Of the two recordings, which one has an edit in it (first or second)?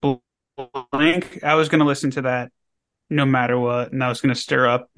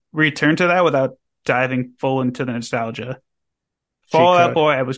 second